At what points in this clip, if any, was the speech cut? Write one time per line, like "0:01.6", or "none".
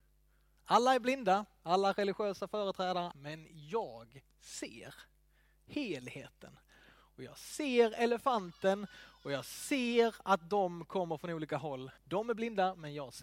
0:03.1
0:12.0